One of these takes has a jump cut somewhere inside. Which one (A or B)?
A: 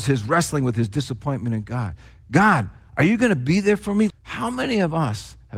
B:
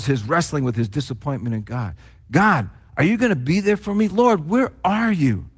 A